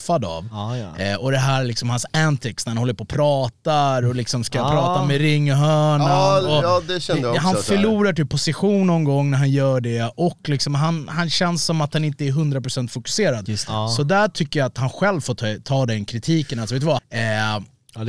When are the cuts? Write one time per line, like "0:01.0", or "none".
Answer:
0:17.0